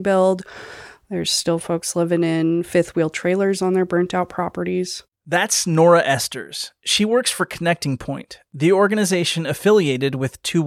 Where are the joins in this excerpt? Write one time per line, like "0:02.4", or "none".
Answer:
none